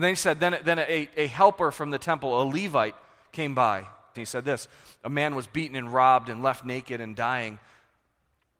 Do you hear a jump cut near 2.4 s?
no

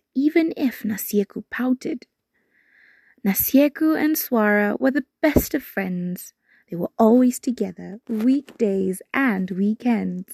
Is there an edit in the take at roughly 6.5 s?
no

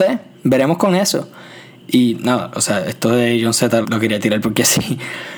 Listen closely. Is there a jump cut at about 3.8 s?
yes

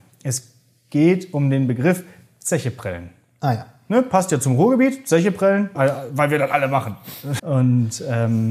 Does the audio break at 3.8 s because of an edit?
no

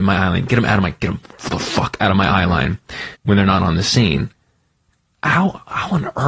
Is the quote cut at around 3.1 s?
yes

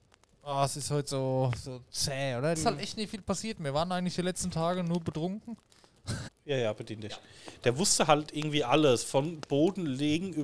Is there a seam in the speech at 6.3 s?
yes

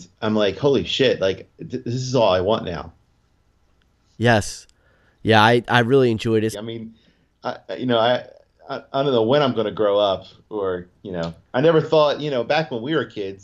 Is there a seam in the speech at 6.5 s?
yes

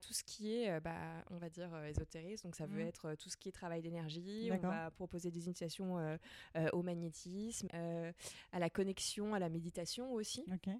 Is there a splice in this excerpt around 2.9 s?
no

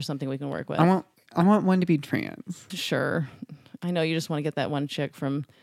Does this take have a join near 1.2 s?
no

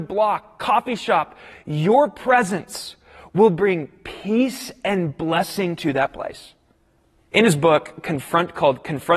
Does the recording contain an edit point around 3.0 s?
no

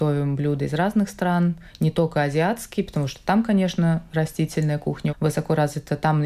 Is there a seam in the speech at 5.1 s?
yes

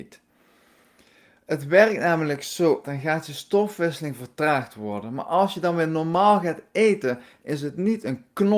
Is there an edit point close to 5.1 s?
no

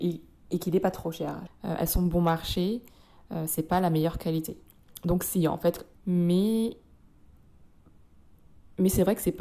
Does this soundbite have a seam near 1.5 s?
yes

